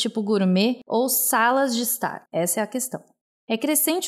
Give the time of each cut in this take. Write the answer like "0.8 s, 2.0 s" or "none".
2.3 s